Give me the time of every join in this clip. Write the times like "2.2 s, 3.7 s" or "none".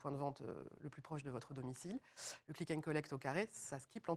none